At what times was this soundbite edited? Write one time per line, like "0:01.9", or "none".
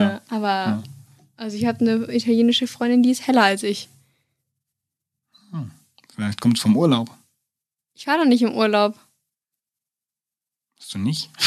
none